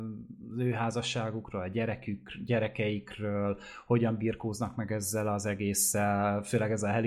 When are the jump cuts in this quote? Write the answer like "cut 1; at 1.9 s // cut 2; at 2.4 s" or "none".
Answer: none